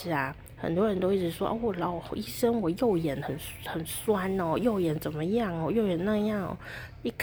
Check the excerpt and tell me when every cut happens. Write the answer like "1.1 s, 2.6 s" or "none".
none